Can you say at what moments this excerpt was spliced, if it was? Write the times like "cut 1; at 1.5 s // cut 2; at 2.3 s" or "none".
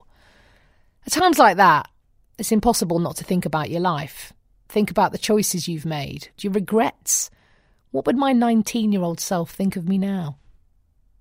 cut 1; at 6.4 s